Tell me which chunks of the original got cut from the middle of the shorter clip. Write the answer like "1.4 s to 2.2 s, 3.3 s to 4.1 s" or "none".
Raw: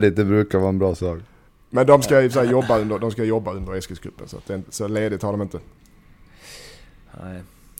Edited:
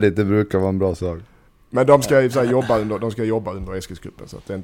none